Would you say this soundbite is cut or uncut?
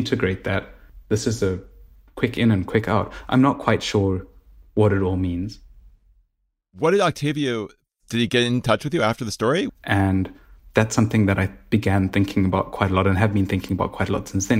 cut